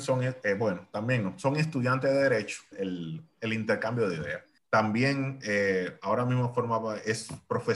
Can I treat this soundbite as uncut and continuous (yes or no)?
no